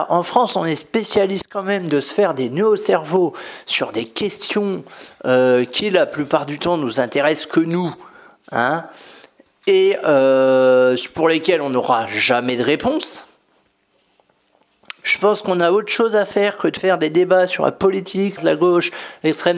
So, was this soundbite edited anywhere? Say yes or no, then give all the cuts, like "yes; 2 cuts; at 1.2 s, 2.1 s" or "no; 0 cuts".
yes; 2 cuts; at 15.0 s, 18.4 s